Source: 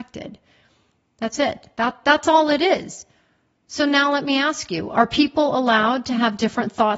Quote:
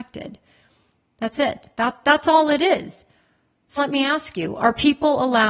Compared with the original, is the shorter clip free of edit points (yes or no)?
no